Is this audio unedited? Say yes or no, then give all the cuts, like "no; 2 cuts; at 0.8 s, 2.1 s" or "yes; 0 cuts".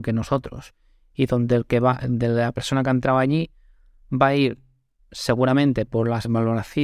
yes; 0 cuts